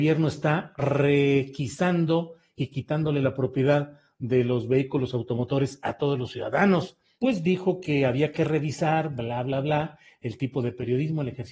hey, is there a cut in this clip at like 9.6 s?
no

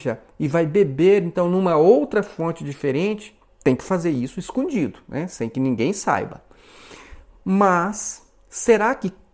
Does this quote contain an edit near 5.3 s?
no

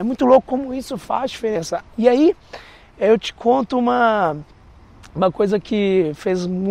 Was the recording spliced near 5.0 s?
no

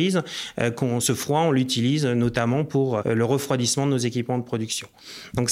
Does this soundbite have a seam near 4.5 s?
no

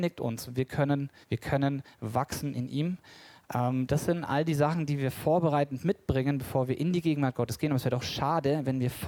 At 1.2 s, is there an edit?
yes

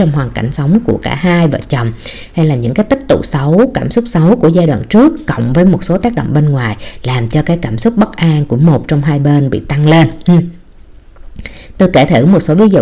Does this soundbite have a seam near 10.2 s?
no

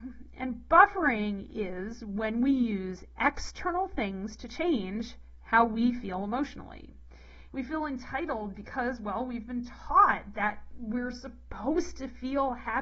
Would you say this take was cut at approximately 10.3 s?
yes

